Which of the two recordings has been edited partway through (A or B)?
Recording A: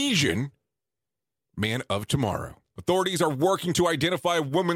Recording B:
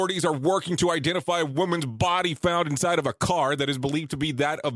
A